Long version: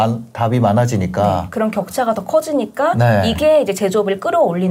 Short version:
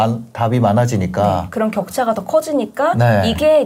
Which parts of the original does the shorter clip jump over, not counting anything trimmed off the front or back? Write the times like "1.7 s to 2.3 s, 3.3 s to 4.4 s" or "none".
none